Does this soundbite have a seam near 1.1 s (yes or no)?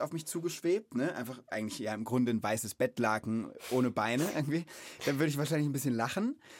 no